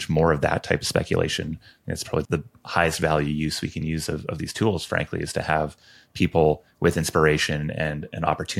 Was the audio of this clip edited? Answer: yes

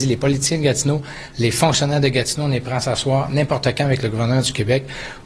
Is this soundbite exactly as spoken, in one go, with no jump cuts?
yes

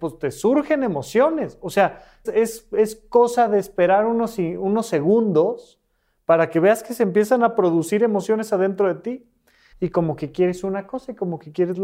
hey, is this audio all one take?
no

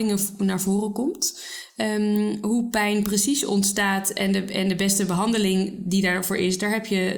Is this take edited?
yes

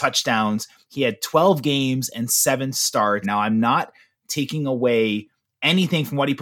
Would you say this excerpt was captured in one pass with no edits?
no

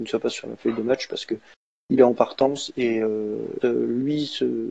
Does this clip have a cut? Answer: yes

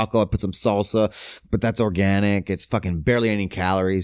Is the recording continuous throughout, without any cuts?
yes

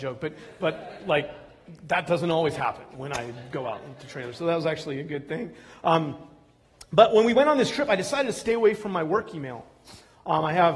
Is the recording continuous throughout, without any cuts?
yes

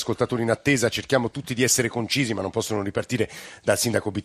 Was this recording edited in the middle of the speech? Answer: no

